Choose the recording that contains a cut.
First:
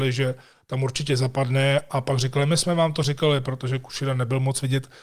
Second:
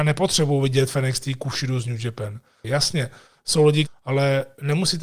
second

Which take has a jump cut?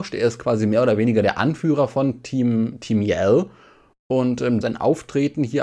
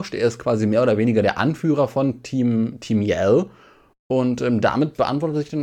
first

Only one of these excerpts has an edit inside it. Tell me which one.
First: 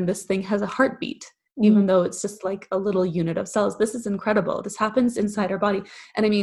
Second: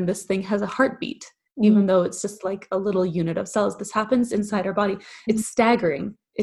second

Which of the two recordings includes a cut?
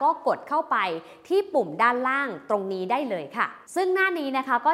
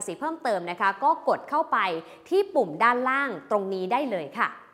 first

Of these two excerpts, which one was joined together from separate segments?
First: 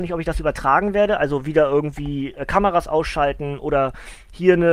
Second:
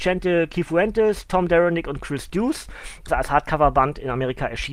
second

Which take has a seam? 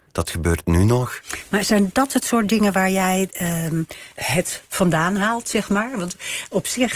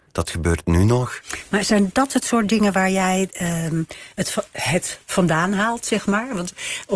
first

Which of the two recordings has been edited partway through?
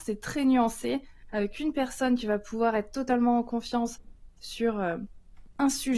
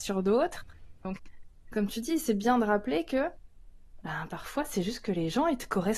second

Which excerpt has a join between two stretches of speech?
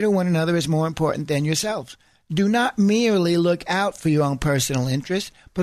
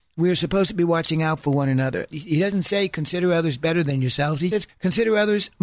second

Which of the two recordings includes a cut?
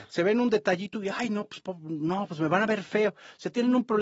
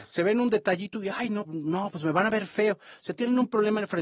second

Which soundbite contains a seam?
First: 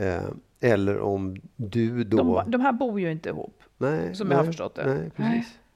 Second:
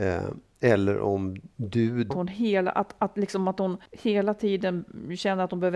second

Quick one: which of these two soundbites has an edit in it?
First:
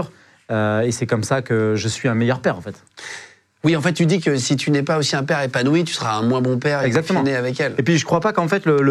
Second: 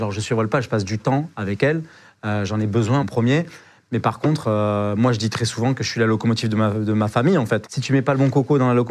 second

